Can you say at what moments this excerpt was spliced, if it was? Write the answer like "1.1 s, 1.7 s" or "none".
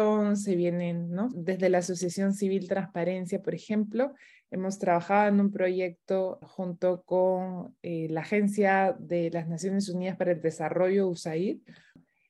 1.3 s, 6.4 s